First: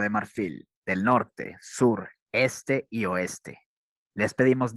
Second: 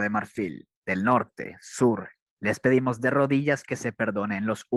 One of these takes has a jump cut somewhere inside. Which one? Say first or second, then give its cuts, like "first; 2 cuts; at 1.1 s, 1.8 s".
second; 1 cut; at 2.3 s